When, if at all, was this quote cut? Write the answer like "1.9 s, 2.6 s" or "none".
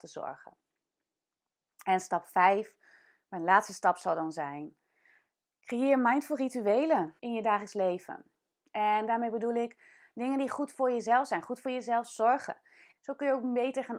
7.2 s, 12.9 s